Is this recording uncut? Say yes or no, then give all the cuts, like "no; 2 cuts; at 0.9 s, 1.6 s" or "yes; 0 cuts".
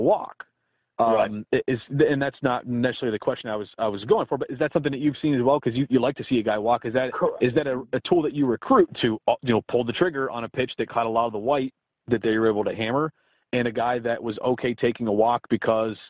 no; 1 cut; at 8.9 s